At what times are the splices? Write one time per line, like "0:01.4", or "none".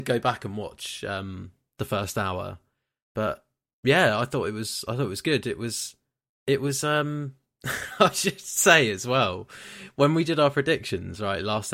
none

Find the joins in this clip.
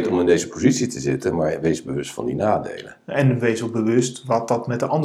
none

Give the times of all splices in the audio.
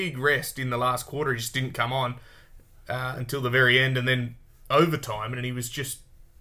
none

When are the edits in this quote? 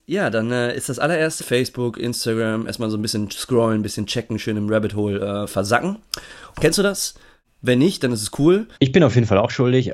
0:01.4
0:06.5
0:08.7

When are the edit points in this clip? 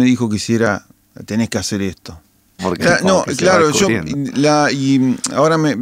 0:02.6

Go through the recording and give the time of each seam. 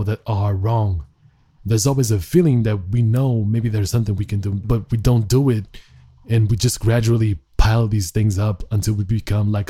0:04.6

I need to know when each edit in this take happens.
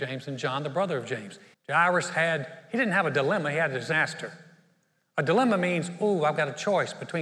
0:01.5

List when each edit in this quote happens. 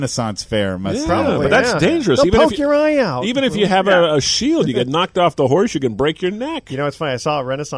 none

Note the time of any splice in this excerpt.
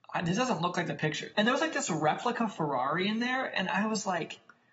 0:01.3

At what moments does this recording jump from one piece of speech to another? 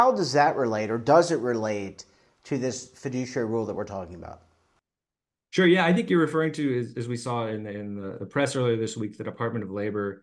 none

